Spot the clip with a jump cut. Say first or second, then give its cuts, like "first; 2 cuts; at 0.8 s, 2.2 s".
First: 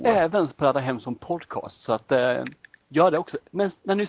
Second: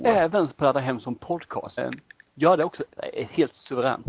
second; 2 cuts; at 1.8 s, 3.0 s